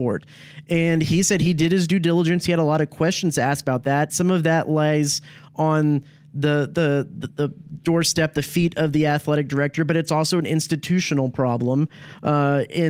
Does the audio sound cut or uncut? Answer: uncut